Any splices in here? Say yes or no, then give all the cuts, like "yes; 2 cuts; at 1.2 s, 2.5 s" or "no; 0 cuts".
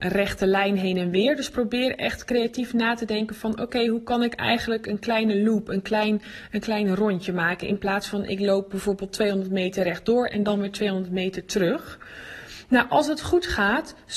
no; 0 cuts